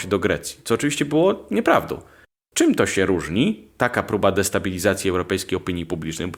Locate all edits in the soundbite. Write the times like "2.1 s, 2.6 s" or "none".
none